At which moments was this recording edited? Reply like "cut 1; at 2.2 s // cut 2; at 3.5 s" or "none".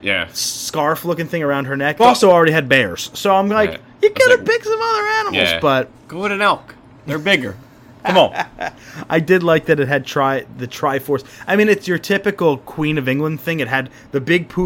cut 1; at 2.0 s

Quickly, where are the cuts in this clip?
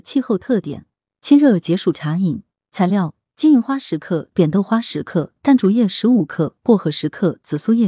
cut 1; at 1.1 s // cut 2; at 4.3 s

